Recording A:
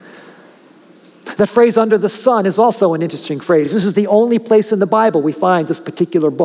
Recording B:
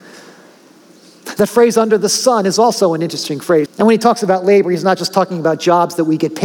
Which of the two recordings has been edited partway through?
B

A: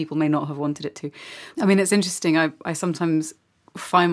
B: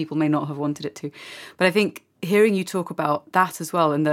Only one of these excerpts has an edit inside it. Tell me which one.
A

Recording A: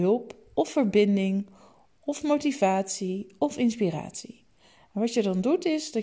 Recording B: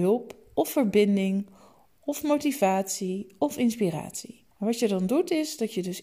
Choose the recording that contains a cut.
B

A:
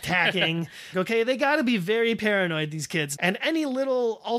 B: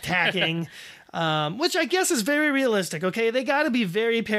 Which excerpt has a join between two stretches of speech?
A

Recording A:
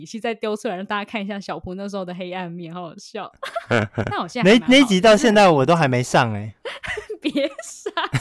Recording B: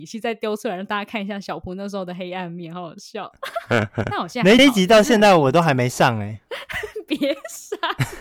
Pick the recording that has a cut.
B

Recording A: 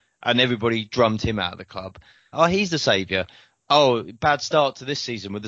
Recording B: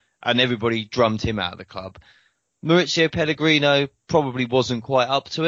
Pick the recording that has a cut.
A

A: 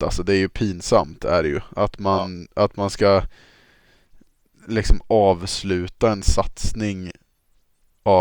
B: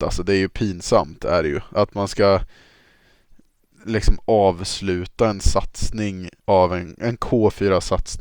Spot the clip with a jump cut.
B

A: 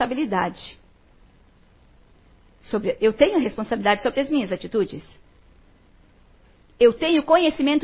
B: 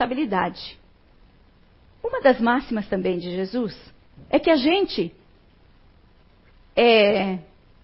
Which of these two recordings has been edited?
B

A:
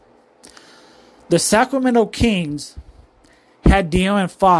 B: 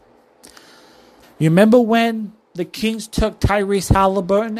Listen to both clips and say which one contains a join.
B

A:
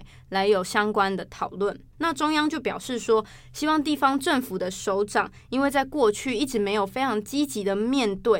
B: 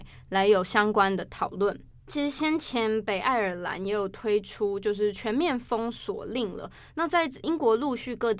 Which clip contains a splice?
A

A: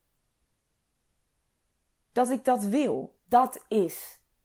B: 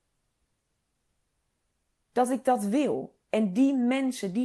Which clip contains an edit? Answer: A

